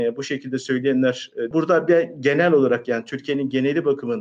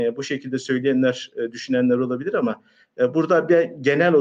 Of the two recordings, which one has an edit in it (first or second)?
first